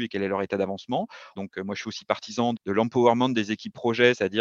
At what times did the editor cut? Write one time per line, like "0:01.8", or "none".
0:01.4
0:02.6